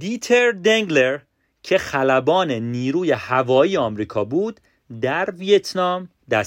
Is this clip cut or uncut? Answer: uncut